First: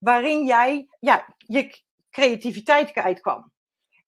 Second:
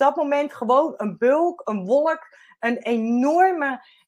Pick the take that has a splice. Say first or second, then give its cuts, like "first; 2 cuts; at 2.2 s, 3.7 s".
first; 1 cut; at 0.9 s